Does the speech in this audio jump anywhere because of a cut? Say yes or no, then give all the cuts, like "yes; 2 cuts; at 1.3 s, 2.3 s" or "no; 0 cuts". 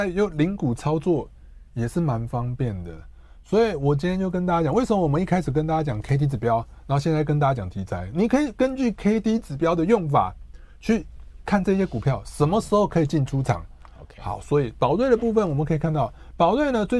no; 0 cuts